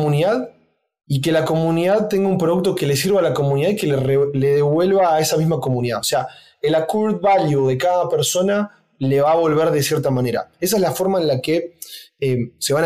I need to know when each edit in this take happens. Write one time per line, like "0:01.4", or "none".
none